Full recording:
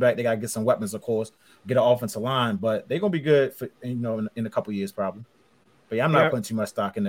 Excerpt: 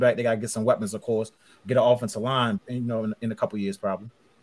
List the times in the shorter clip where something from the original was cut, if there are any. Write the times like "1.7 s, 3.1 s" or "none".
2.6 s